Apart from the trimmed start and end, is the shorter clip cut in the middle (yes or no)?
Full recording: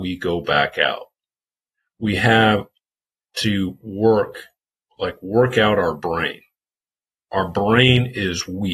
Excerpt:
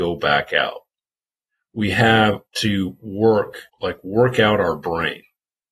yes